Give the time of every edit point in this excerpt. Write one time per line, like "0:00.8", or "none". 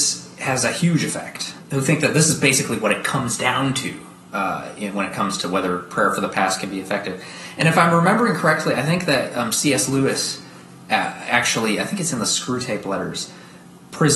none